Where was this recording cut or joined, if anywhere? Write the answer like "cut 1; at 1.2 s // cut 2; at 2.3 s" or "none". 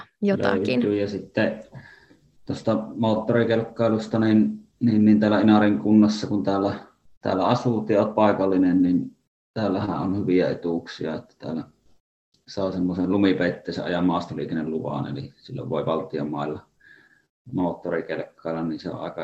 none